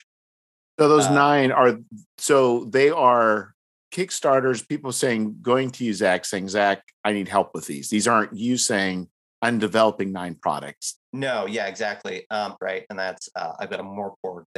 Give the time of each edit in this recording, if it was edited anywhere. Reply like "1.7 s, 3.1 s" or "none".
10.9 s, 12.6 s